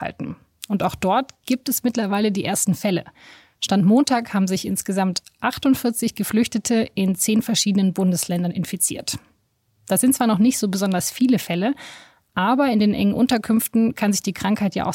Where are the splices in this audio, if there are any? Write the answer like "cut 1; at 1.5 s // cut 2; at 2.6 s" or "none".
none